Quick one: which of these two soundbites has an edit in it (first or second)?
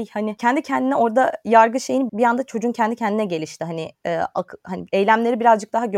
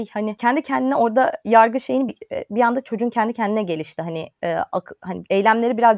first